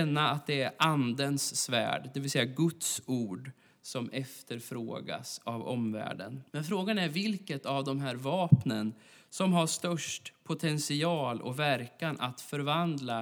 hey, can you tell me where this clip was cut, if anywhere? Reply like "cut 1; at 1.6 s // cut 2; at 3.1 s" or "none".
cut 1; at 6.5 s